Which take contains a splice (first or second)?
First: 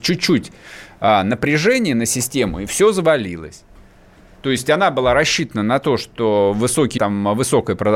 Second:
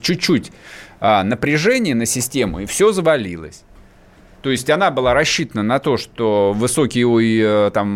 first